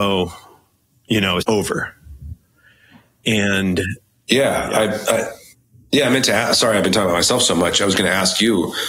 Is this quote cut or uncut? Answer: cut